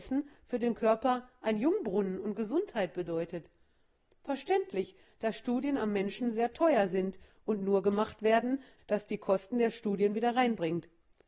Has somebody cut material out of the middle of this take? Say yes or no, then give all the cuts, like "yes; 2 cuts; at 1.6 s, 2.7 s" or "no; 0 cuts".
yes; 1 cut; at 8.8 s